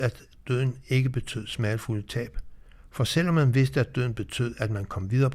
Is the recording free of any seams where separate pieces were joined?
yes; 0 cuts

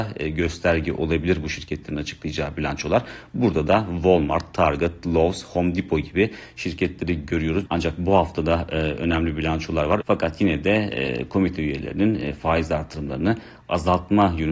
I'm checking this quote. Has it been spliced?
yes; 2 cuts; at 7.7 s, 10.0 s

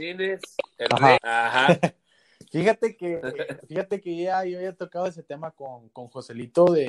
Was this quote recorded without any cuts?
no; 1 cut; at 1.2 s

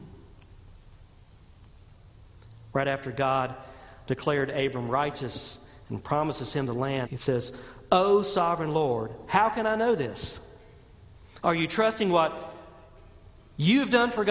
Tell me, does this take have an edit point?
yes; 2 cuts; at 7.1 s, 11.4 s

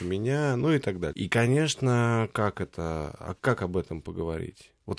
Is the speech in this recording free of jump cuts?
no; 2 cuts; at 1.1 s, 2.3 s

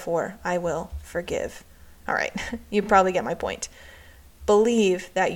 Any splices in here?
no; 0 cuts

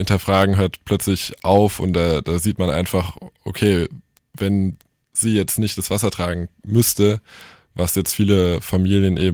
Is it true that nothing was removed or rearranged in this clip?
yes; 0 cuts

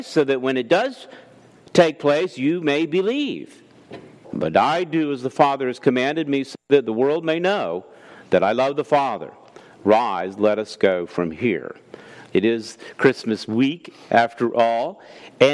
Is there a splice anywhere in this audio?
yes; 2 cuts; at 4.2 s, 12.3 s

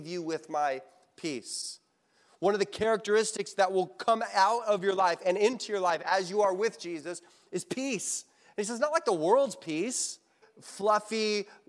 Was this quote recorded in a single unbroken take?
no; 1 cut; at 10.4 s

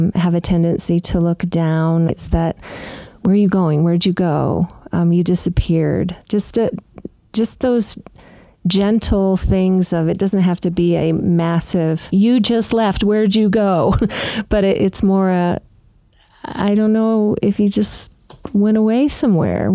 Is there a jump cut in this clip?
yes; 1 cut; at 2.1 s

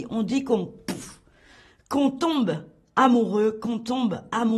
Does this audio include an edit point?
no; 0 cuts

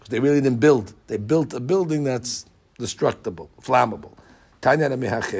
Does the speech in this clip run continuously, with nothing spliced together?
no; 2 cuts; at 1.0 s, 3.6 s

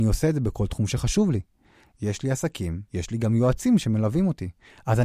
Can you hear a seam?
yes; 1 cut; at 2.9 s

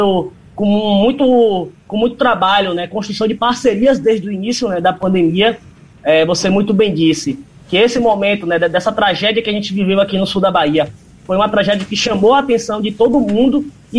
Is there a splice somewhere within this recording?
no; 0 cuts

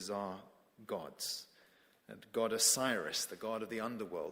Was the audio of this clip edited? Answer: no; 0 cuts

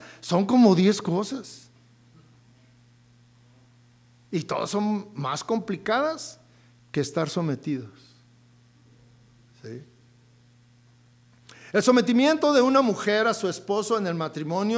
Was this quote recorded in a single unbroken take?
yes; 0 cuts

